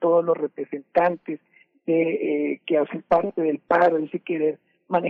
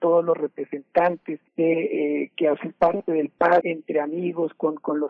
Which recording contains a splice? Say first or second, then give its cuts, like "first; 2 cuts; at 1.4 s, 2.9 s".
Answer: second; 2 cuts; at 1.5 s, 3.6 s